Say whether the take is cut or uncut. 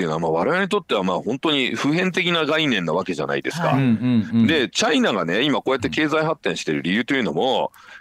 uncut